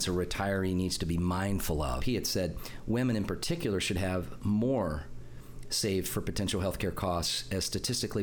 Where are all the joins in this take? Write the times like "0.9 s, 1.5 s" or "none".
2.0 s